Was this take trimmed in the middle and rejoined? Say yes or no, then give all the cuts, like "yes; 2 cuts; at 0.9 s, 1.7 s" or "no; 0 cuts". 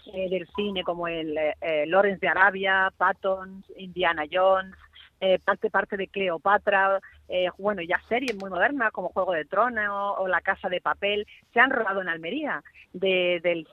yes; 1 cut; at 12.8 s